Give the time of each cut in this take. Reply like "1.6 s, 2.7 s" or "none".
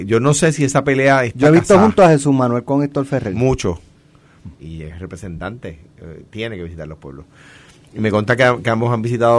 4.6 s, 6.2 s